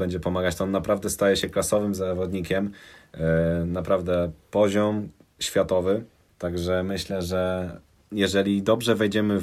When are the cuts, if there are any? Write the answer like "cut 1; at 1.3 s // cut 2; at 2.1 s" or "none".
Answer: cut 1; at 6.3 s

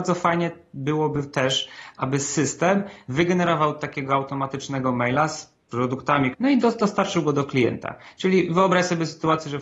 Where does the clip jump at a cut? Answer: cut 1; at 6.3 s

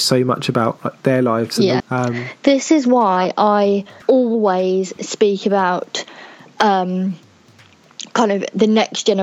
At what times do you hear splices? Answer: cut 1; at 1.8 s // cut 2; at 4.0 s

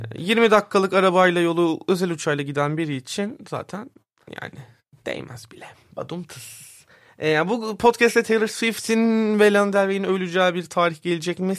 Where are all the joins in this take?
none

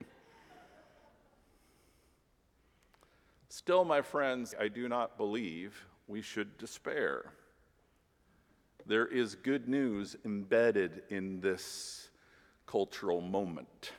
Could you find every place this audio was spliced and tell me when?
cut 1; at 4.5 s

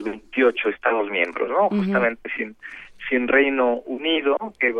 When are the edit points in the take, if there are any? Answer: none

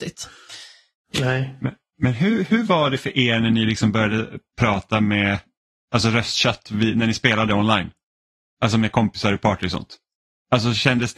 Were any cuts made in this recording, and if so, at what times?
none

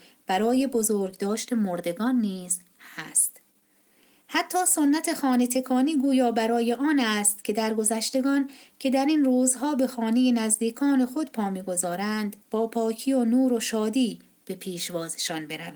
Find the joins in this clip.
cut 1; at 12.4 s

